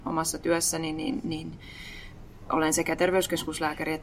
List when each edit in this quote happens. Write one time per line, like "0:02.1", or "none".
none